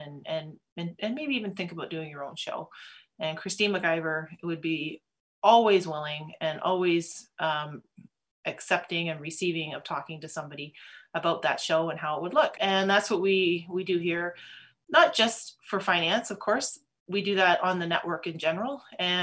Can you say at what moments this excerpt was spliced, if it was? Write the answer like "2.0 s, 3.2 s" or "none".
12.6 s